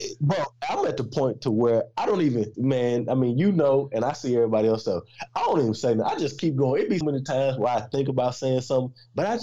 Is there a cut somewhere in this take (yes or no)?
yes